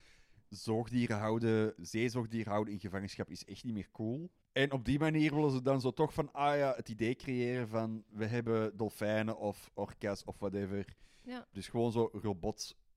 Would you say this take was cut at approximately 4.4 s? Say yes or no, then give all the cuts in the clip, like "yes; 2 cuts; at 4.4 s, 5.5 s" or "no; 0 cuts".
yes; 3 cuts; at 1.8 s, 4.4 s, 11.5 s